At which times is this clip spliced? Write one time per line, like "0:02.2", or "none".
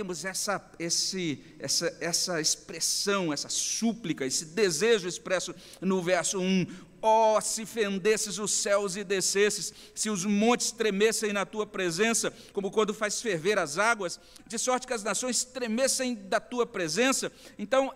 0:12.5
0:14.4